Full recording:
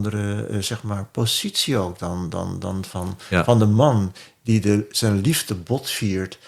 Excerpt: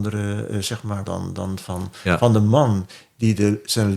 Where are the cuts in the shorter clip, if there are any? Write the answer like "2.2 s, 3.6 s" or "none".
1.1 s